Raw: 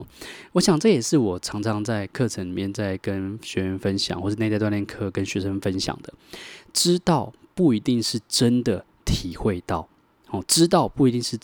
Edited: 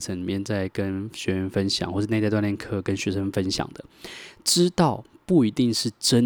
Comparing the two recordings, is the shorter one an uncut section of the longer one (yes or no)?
yes